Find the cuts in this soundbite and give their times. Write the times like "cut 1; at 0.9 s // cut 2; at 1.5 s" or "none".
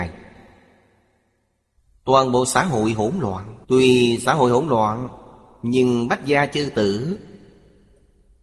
cut 1; at 3.6 s